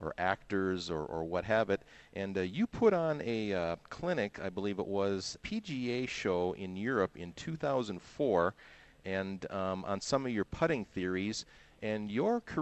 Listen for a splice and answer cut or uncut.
cut